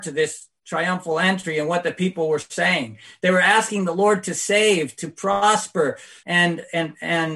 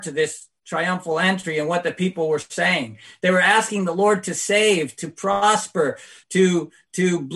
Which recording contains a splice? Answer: first; 1 cut; at 6.2 s

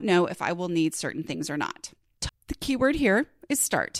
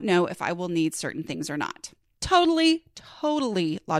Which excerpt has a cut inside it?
first; 1 cut; at 2.3 s

